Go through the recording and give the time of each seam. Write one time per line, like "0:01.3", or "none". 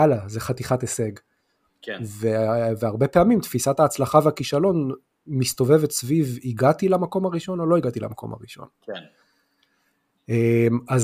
none